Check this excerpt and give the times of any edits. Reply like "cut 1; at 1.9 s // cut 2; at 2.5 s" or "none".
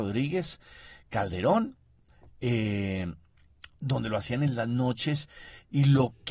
none